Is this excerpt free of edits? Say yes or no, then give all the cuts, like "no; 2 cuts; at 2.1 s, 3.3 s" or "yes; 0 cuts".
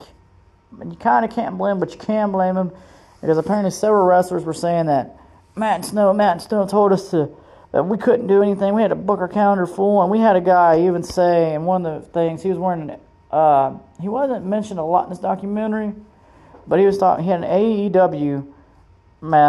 yes; 0 cuts